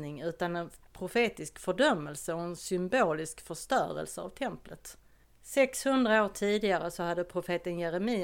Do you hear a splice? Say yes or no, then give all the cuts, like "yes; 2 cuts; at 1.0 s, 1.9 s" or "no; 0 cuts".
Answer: no; 0 cuts